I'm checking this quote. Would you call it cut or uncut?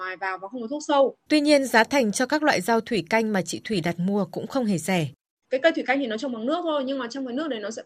cut